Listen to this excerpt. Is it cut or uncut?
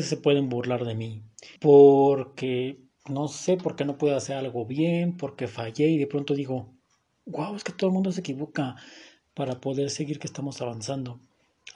cut